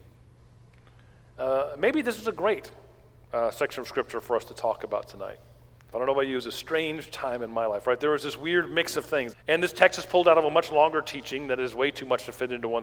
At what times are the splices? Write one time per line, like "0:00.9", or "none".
0:05.9
0:09.3